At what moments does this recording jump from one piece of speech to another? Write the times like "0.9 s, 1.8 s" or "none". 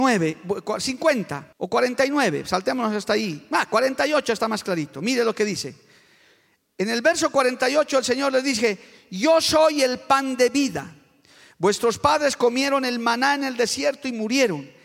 1.5 s